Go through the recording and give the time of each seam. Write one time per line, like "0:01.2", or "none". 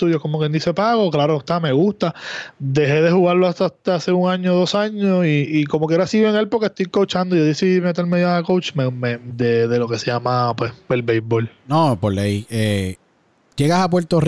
0:09.3